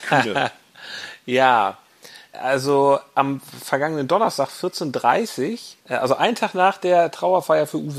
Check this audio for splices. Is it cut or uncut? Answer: cut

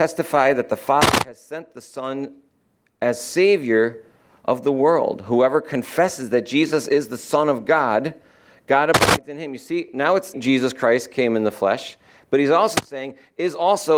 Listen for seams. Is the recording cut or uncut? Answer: cut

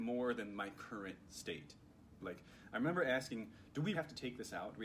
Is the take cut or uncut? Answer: cut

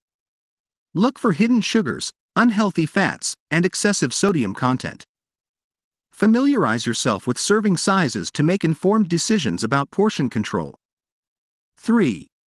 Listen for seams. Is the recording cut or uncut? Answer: uncut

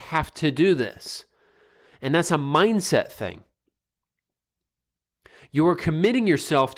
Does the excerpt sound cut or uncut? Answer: uncut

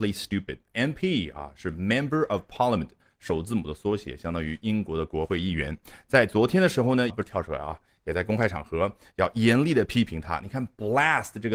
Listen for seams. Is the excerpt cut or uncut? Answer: cut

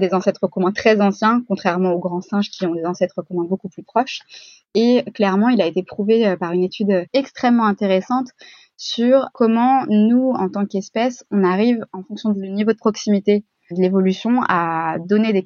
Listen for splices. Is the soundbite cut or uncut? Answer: cut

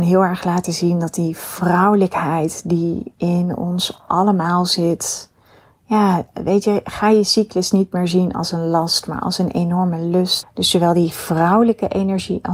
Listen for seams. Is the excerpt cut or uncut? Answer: cut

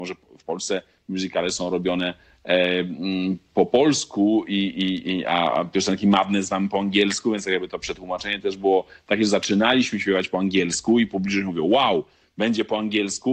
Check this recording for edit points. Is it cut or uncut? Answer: uncut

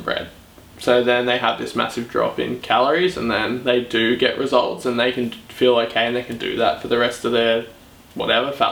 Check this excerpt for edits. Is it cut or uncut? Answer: uncut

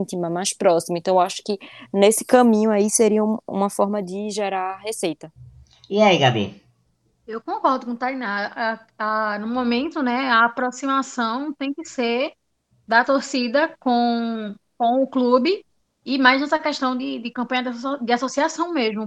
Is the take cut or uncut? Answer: uncut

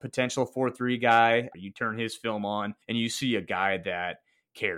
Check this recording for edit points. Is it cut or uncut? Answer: cut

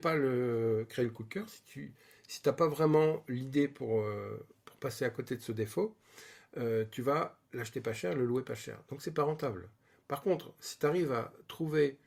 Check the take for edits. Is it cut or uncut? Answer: uncut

